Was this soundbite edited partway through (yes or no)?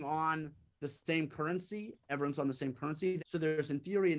yes